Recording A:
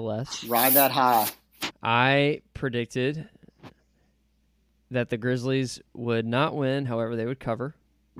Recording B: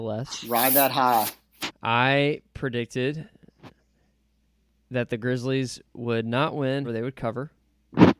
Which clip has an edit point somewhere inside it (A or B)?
B